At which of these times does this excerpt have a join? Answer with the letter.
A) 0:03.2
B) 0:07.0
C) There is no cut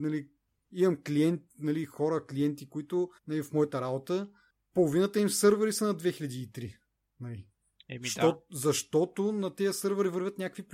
A